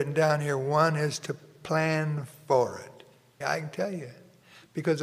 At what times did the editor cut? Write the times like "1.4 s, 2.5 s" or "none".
3.4 s